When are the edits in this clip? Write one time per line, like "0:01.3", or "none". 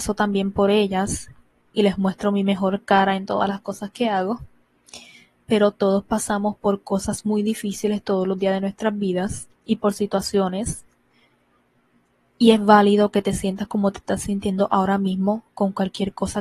0:09.6

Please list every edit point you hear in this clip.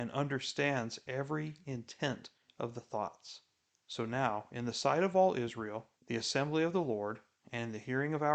0:03.8
0:06.0

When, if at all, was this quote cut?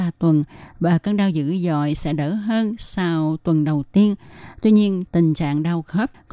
0:05.1

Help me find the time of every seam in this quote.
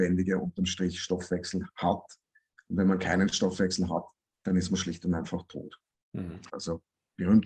0:06.5

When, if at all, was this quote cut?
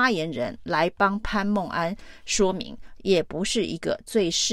none

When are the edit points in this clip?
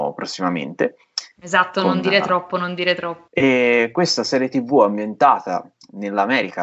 0:03.3

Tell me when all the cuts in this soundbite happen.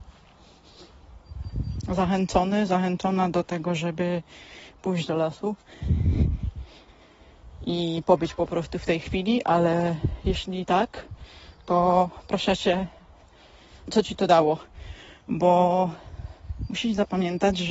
0:13.9

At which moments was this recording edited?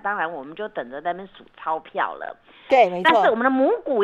0:02.7

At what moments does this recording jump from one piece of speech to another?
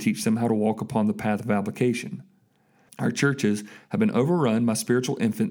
0:02.9

